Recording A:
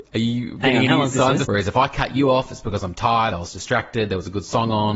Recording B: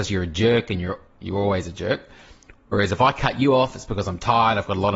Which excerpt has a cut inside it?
A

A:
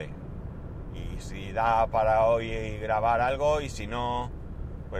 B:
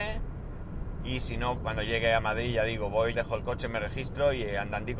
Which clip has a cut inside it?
B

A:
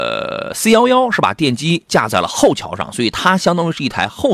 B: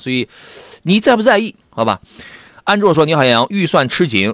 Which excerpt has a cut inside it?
B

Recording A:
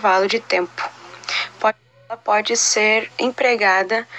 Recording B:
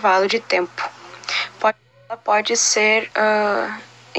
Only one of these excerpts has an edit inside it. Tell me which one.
A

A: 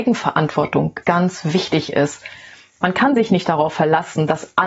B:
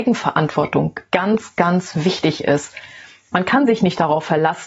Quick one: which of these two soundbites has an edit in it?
A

